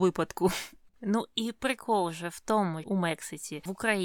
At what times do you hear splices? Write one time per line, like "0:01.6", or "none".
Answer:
0:00.9
0:02.8